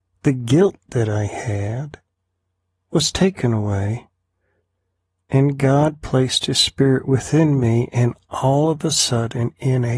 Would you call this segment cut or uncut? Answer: uncut